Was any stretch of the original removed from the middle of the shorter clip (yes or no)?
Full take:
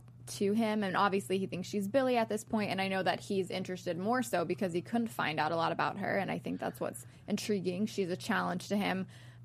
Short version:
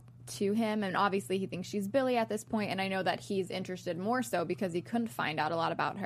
no